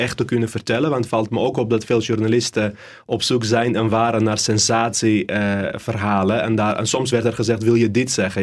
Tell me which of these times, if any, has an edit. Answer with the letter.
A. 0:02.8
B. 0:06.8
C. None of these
C